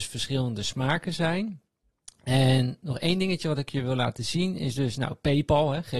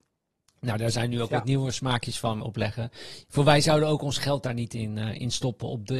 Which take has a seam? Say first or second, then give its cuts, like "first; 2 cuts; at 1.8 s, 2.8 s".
second; 1 cut; at 2.4 s